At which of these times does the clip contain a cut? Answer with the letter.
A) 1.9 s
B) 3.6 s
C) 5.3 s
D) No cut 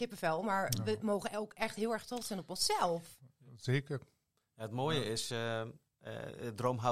D